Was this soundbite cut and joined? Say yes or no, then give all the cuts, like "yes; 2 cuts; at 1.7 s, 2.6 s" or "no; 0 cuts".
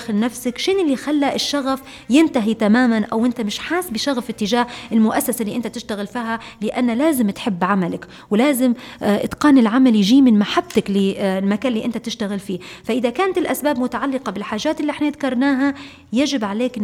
no; 0 cuts